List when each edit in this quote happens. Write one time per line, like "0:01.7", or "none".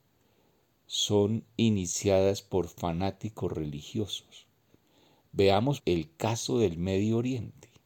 0:05.8